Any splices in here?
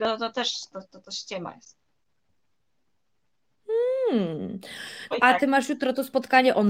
yes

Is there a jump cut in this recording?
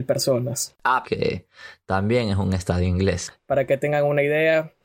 yes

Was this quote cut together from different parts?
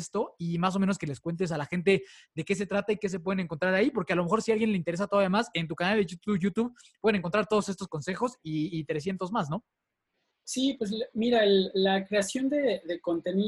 yes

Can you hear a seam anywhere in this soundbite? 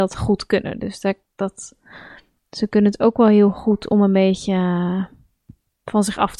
no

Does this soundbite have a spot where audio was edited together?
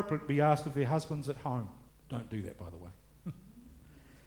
yes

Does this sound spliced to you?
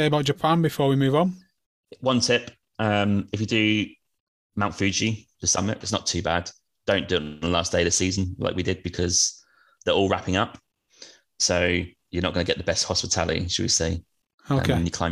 yes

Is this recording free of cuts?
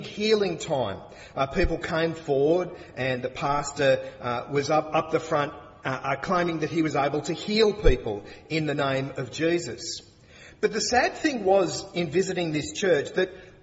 yes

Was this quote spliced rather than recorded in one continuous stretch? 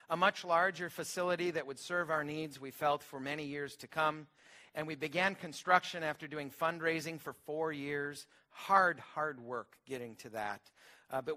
no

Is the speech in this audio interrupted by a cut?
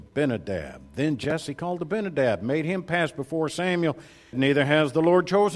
yes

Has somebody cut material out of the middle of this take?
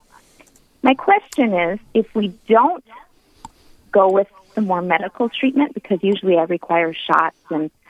yes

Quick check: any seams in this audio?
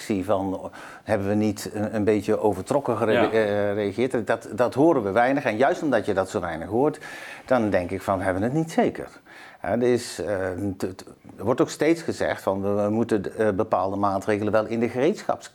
no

